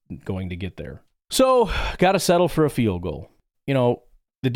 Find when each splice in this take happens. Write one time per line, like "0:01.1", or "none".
0:03.5